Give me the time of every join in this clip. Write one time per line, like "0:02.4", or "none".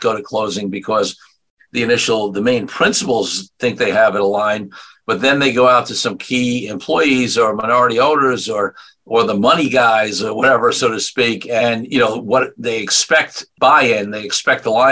none